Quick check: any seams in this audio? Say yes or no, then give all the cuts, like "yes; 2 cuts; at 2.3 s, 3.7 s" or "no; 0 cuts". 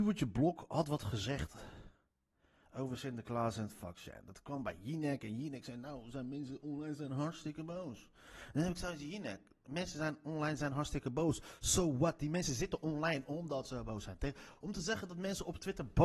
no; 0 cuts